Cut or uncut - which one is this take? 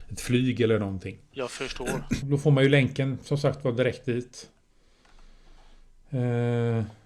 cut